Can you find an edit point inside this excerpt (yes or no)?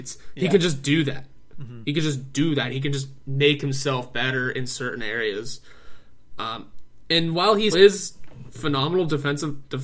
yes